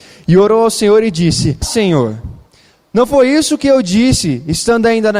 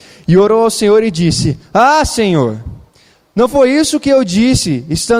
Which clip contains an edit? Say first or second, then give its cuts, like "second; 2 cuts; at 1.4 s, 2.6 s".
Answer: first; 1 cut; at 1.6 s